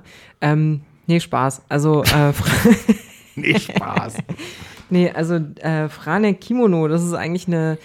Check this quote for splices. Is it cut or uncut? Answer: uncut